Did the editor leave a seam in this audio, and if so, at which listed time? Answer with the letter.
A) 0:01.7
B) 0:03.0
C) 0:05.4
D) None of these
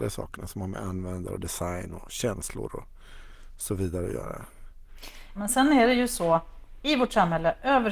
C